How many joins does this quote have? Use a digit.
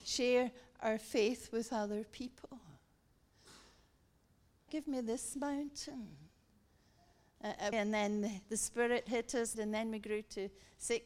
3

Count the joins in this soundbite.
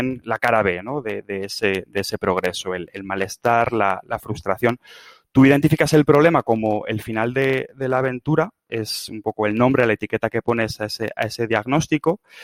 0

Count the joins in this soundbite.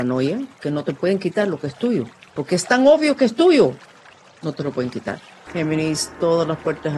1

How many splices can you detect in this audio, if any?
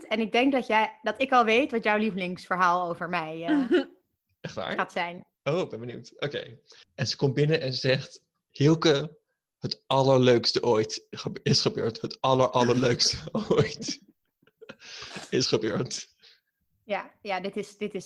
2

